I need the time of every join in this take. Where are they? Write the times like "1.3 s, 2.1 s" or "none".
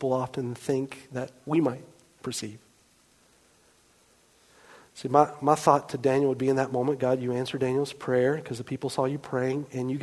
none